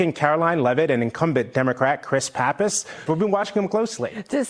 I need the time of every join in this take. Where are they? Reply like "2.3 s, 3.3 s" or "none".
3.1 s